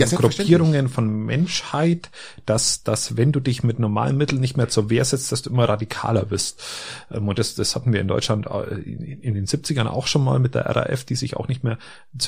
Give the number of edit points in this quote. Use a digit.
0